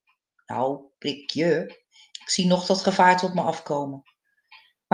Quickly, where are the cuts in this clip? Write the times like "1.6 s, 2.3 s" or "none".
2.1 s